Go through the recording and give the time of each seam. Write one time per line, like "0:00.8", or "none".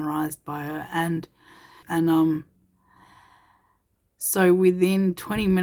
0:01.8